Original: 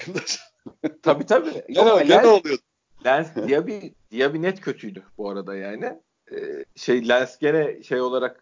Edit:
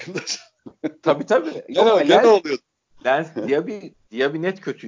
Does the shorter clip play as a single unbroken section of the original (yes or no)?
yes